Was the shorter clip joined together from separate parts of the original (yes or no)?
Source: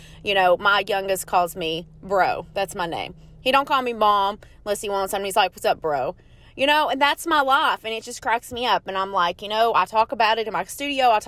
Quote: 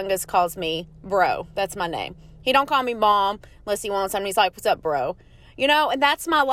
no